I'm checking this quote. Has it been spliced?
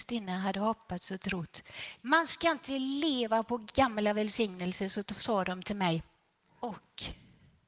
yes; 2 cuts; at 2.0 s, 6.4 s

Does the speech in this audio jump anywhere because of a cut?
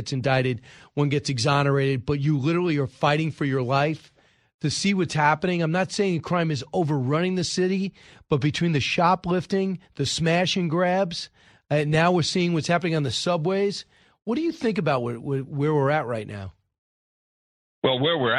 no; 0 cuts

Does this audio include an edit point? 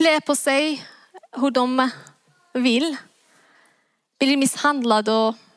no; 0 cuts

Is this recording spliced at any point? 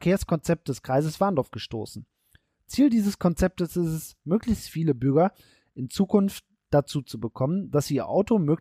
no; 0 cuts

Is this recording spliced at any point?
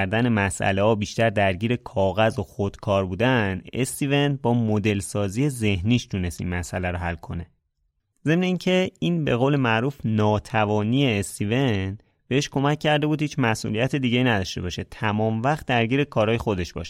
no; 0 cuts

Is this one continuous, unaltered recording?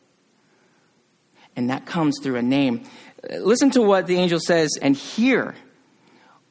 no; 2 cuts; at 1.3 s, 4.8 s

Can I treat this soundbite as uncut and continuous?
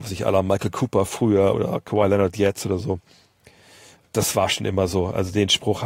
no; 1 cut; at 1.5 s

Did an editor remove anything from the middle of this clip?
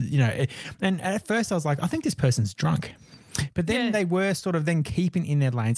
no; 0 cuts

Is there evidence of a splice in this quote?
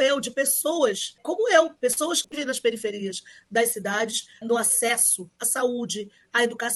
yes; 1 cut; at 4.4 s

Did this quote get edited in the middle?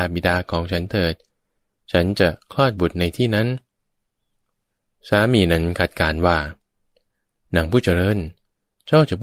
no; 0 cuts

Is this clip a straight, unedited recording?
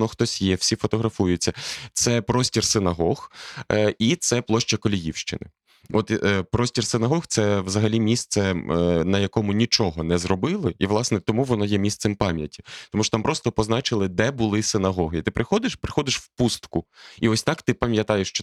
yes; 0 cuts

